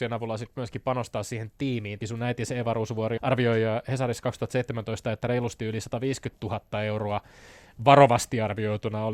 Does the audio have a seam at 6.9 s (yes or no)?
no